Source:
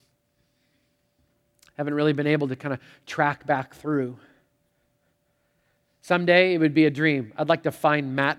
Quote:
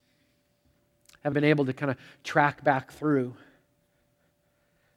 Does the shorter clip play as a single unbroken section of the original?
no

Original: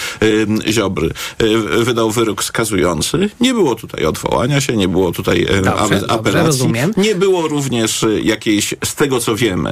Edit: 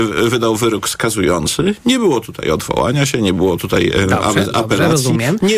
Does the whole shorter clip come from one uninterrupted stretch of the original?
yes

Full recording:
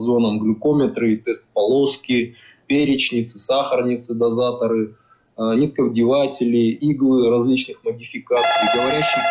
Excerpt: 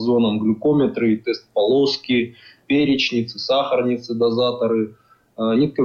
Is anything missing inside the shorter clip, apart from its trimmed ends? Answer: no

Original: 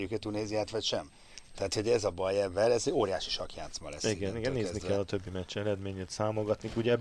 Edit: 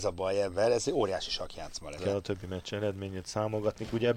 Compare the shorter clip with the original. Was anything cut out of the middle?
yes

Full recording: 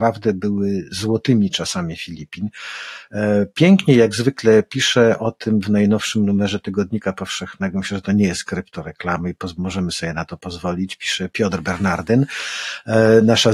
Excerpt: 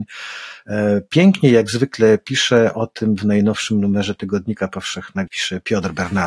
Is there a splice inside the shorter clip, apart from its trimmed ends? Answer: yes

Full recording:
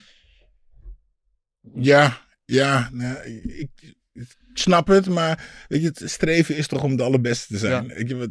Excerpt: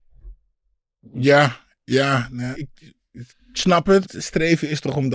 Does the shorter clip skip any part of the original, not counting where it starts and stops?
yes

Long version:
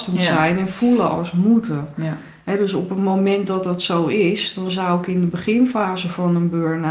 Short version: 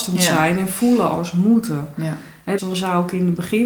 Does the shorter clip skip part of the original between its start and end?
yes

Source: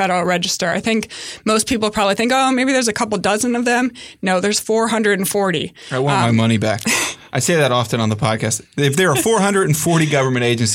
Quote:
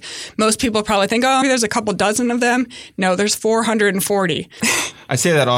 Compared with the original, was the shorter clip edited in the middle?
yes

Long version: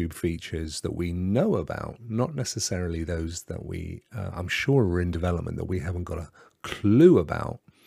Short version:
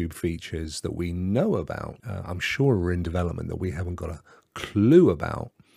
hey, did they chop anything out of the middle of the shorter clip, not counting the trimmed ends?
yes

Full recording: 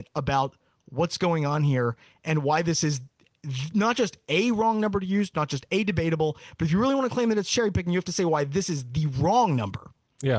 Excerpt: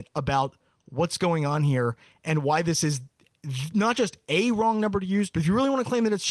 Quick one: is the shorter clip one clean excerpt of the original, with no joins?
no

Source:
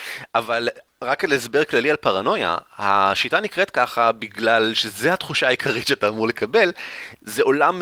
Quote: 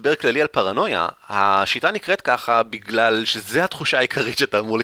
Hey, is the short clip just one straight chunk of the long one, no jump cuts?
yes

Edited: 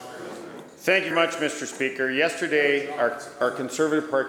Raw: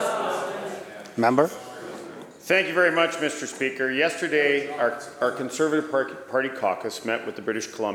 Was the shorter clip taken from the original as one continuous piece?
no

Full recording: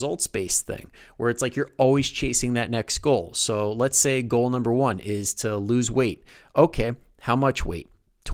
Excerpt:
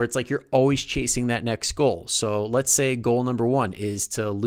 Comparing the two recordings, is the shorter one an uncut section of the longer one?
yes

